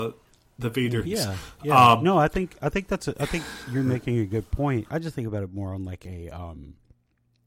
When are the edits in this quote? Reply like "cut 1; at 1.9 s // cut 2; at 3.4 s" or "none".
cut 1; at 1.0 s // cut 2; at 4.9 s